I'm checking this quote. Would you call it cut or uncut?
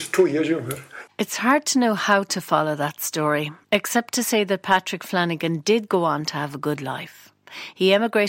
cut